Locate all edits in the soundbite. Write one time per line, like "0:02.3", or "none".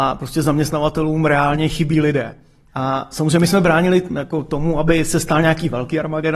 0:02.7